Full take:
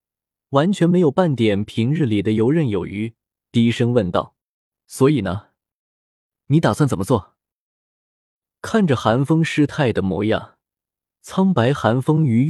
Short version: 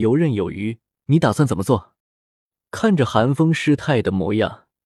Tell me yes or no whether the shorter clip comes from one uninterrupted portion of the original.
no